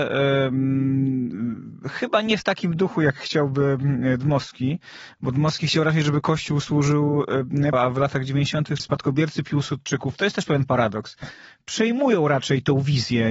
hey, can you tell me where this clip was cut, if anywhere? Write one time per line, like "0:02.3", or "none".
0:07.7
0:08.8